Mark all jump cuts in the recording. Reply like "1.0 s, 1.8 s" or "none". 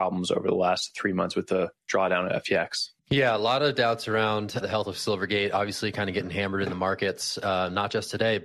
3.0 s, 4.6 s